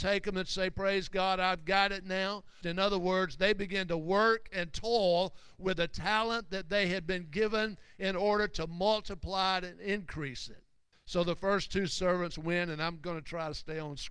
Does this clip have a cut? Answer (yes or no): yes